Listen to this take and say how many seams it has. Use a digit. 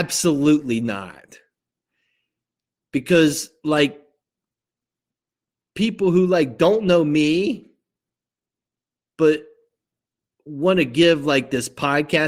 0